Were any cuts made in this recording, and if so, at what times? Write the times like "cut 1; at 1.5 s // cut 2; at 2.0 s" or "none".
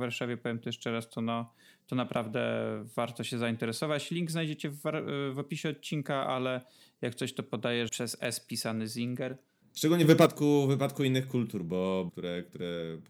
cut 1; at 7.9 s // cut 2; at 9.6 s // cut 3; at 12.1 s